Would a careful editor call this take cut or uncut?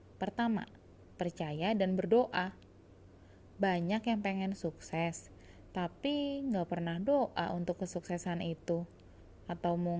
uncut